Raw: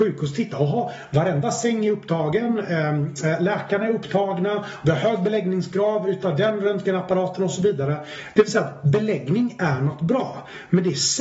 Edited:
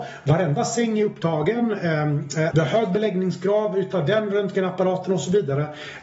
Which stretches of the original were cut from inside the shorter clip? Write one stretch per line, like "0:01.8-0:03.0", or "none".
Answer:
0:03.4-0:04.8